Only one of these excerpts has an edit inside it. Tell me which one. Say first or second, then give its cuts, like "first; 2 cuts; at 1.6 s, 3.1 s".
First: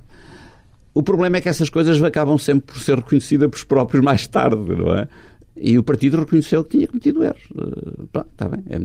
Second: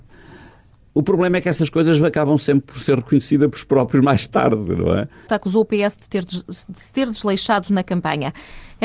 second; 1 cut; at 5.3 s